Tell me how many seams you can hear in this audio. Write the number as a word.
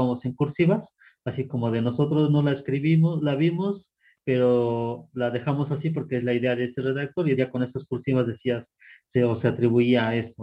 one